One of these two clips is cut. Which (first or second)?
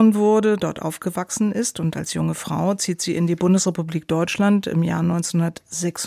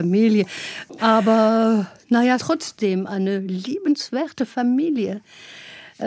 second